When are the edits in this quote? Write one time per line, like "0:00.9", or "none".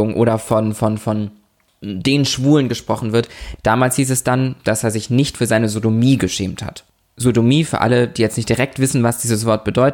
0:03.6